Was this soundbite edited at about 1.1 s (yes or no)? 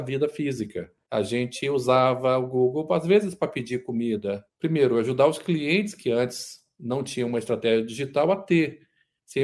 yes